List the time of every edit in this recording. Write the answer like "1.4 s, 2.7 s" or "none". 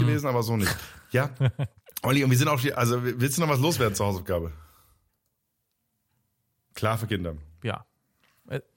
6.7 s

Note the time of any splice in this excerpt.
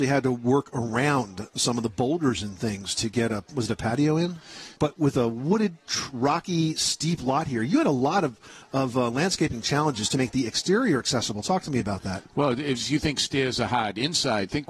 4.8 s

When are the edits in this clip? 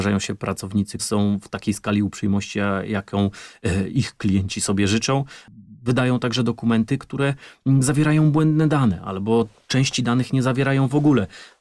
1.0 s

